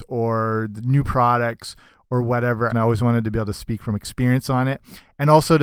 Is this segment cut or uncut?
cut